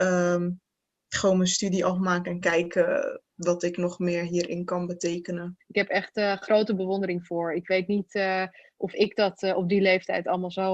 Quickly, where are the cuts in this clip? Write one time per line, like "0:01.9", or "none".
0:05.6